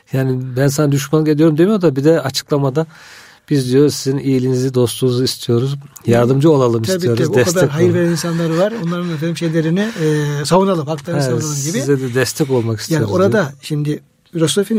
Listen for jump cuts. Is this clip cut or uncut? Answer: uncut